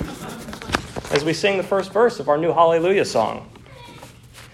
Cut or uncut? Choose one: uncut